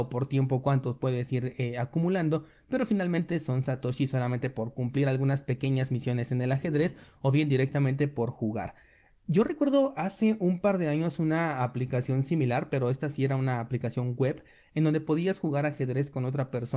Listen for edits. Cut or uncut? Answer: uncut